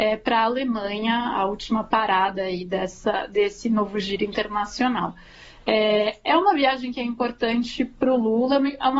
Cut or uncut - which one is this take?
uncut